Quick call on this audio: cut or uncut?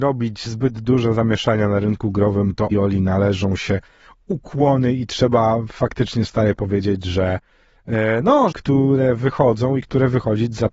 cut